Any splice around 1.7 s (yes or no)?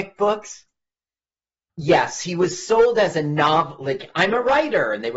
yes